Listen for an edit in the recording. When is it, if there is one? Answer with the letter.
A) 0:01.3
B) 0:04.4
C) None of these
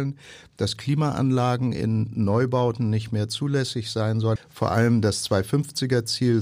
B